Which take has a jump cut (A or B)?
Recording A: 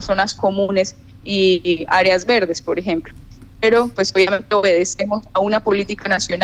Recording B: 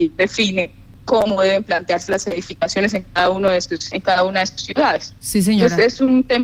A